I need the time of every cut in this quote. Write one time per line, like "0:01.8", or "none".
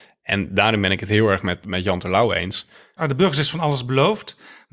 0:01.6
0:03.0